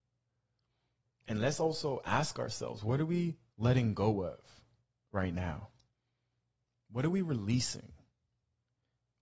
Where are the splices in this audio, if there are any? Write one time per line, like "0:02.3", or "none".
none